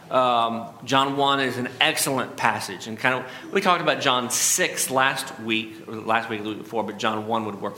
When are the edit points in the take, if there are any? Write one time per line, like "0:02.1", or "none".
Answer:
none